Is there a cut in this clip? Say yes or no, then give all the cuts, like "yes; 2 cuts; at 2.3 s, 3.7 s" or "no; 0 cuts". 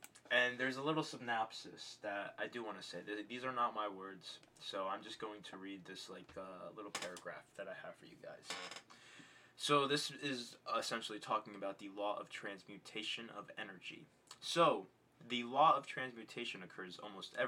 no; 0 cuts